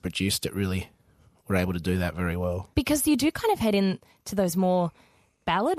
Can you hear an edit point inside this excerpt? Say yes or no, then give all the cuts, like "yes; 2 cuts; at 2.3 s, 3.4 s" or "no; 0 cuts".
yes; 1 cut; at 2.7 s